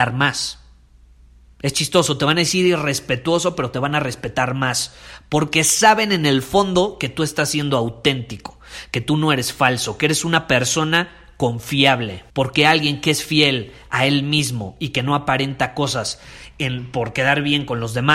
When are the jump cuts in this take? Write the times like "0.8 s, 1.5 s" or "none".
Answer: 12.3 s